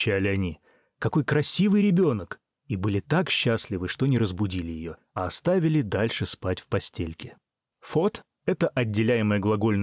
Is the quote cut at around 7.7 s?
yes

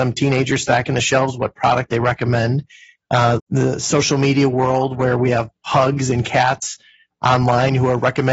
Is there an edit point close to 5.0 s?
no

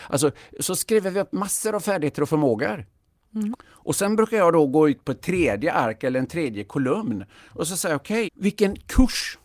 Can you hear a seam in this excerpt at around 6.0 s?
no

